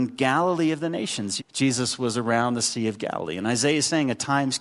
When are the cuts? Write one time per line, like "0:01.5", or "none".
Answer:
0:01.4